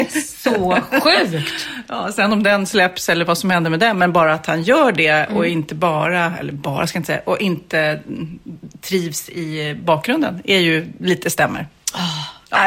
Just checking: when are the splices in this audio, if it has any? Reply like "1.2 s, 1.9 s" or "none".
none